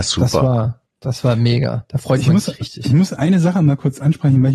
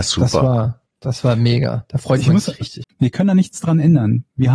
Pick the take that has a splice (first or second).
second